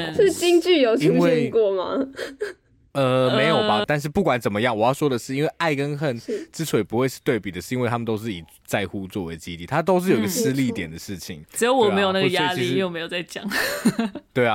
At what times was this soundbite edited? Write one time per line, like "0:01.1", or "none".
0:03.8
0:11.4